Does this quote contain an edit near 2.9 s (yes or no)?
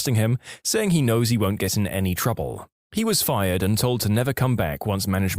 no